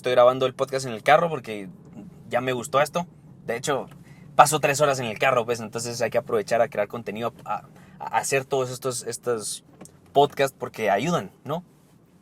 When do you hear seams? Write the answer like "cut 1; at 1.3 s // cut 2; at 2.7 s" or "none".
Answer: none